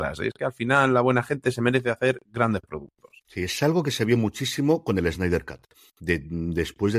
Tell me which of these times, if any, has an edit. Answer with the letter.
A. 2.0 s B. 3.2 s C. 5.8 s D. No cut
D